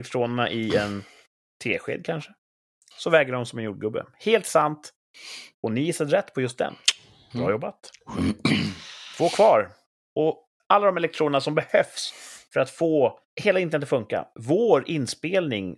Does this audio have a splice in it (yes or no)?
yes